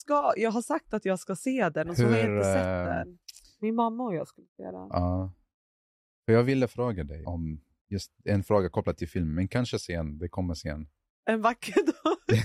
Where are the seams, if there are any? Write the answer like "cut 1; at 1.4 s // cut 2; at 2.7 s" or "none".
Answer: cut 1; at 7.2 s

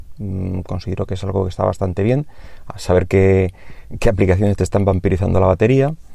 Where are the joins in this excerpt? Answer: none

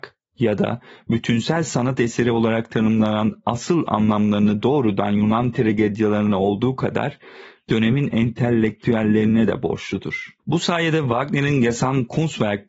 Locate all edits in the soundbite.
cut 1; at 10.4 s

